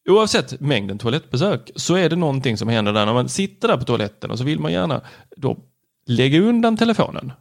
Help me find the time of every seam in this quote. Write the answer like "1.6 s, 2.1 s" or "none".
none